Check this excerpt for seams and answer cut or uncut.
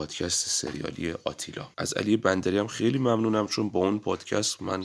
cut